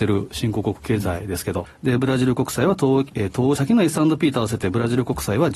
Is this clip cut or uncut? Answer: cut